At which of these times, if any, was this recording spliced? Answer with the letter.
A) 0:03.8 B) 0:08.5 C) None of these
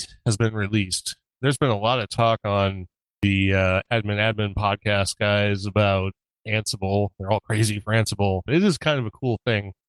B